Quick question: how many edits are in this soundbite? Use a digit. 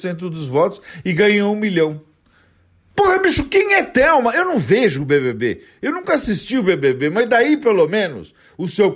0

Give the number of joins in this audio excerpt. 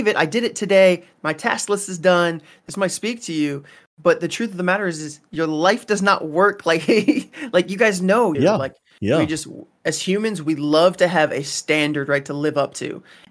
1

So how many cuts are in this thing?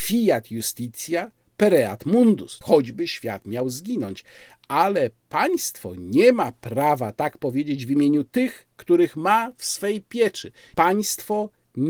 2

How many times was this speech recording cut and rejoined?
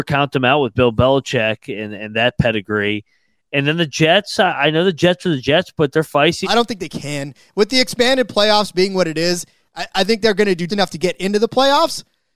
2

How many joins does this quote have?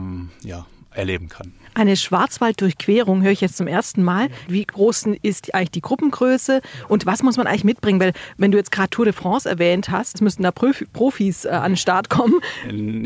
2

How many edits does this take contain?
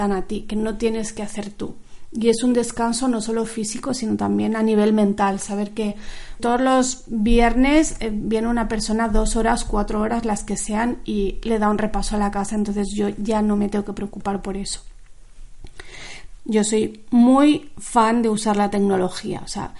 2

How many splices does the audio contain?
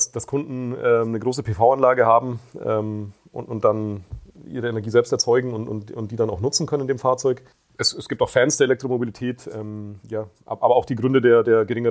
1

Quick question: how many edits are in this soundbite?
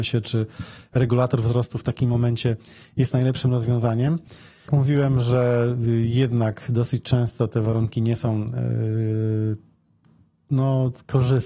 1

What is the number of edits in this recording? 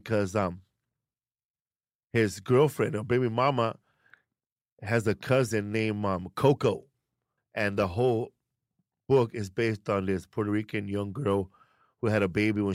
1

